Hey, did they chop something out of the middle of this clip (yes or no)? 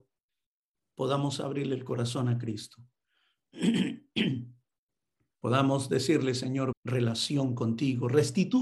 yes